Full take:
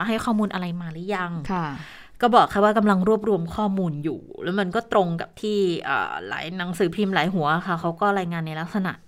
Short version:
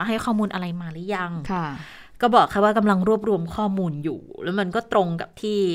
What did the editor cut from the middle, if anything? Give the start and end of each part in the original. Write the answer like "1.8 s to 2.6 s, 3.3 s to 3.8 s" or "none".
none